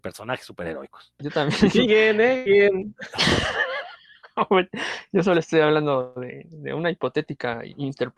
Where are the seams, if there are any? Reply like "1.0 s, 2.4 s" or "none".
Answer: 1.2 s